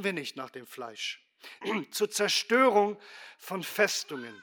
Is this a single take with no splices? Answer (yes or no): no